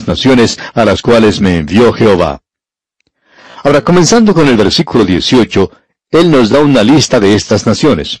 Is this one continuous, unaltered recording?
yes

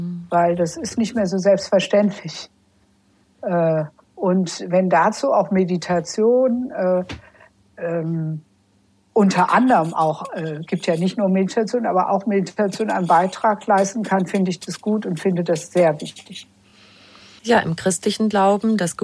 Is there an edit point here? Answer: no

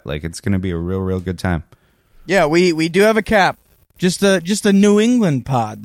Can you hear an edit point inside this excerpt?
yes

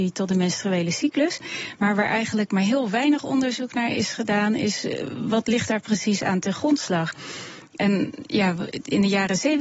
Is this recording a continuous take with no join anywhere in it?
yes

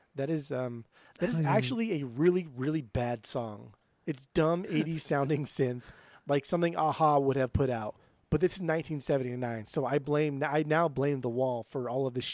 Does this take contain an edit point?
yes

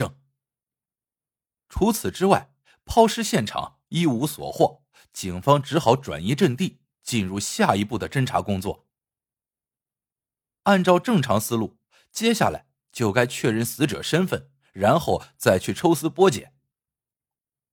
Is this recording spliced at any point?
no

